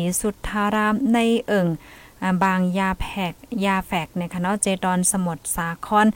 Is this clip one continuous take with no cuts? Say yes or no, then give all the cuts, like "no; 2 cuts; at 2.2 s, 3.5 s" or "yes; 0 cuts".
yes; 0 cuts